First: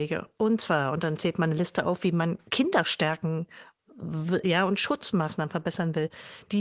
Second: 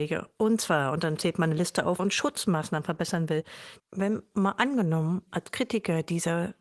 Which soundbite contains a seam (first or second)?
second